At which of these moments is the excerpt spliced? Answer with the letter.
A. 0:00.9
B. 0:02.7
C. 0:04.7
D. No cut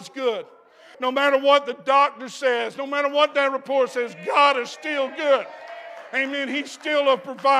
A